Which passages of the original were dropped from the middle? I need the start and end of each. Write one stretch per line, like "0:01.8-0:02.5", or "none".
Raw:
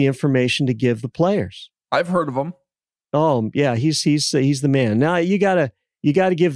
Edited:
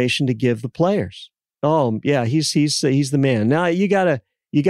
0:01.8-0:03.0